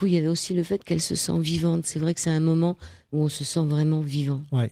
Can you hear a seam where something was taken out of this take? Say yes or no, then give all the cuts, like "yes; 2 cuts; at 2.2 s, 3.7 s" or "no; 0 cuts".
no; 0 cuts